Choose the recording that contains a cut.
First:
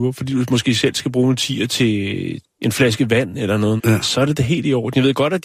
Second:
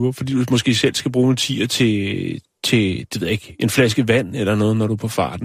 first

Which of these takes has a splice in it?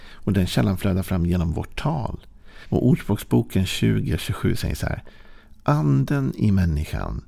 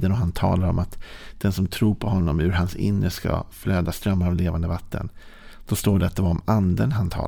first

